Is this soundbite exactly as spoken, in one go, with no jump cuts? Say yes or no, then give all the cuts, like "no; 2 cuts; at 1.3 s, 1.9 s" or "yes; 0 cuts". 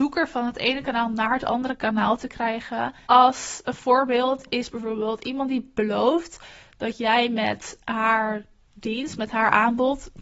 no; 1 cut; at 3.0 s